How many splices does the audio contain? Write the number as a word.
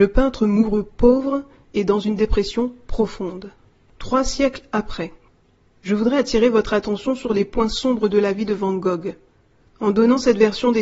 one